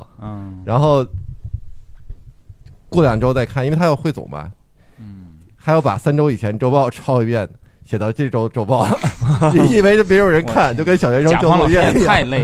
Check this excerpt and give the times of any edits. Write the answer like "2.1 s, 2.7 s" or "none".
none